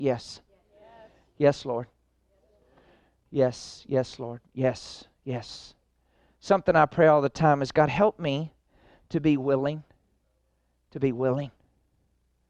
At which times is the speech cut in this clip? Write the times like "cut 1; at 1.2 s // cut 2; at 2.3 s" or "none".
none